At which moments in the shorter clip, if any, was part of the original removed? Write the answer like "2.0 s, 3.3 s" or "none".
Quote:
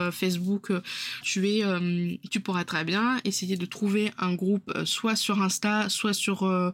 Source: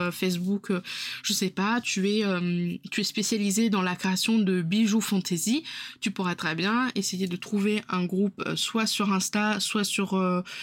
1.2 s, 2.3 s